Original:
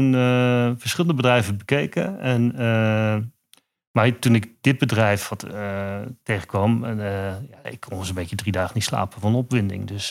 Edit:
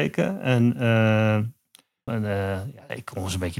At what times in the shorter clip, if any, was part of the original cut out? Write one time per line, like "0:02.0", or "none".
0:02.1